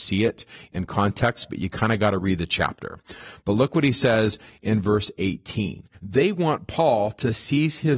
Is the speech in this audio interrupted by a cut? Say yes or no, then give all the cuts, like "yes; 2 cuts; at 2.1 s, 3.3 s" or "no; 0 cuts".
yes; 1 cut; at 5.9 s